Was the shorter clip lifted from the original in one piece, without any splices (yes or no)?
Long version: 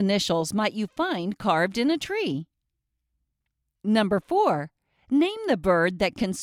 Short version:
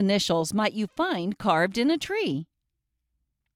yes